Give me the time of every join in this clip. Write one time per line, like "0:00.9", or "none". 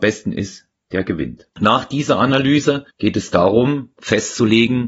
0:01.5
0:02.9